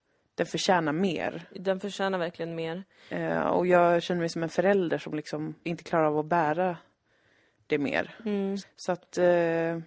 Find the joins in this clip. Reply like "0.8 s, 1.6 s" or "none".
5.6 s, 8.6 s